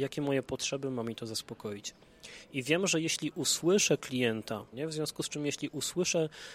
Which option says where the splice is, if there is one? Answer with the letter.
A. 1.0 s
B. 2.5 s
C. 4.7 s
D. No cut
C